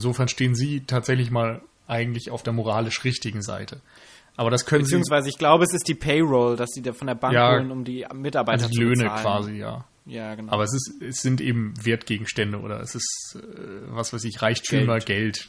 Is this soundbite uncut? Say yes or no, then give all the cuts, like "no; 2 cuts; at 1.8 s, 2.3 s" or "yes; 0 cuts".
yes; 0 cuts